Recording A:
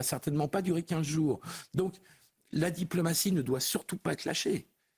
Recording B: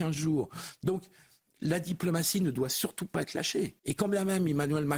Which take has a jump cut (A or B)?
B